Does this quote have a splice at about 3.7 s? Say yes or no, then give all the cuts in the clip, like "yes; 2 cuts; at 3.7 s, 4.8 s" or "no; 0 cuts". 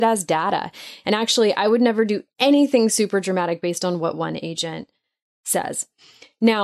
no; 1 cut; at 1.0 s